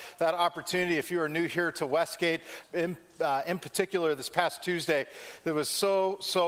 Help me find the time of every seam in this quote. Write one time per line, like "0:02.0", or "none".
0:02.6